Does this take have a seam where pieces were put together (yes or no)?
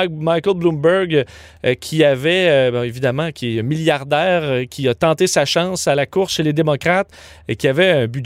no